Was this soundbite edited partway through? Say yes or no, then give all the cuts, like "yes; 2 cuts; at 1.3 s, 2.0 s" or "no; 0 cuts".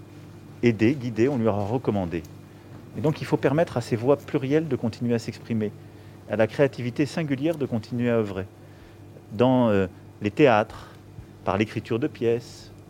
yes; 1 cut; at 2.9 s